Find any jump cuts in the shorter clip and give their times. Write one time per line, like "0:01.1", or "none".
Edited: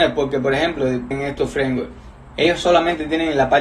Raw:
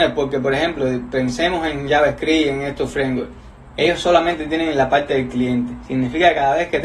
0:01.1